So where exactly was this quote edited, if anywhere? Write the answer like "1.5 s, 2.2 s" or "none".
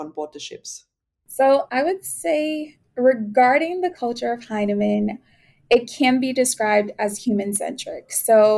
none